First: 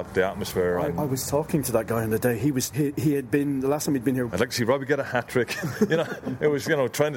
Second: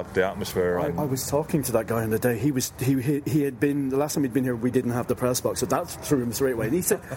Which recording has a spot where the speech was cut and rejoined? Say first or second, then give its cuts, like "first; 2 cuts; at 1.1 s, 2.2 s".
first; 2 cuts; at 2.7 s, 4.3 s